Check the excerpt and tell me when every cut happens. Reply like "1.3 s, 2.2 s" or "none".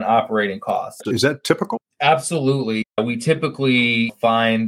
1.0 s